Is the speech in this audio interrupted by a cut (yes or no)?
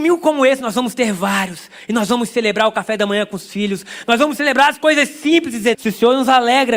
yes